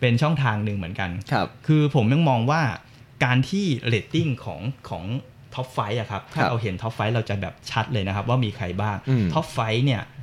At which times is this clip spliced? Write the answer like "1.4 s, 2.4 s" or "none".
none